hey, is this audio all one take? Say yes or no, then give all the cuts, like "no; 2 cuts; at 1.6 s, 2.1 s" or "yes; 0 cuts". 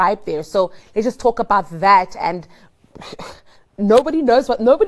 yes; 0 cuts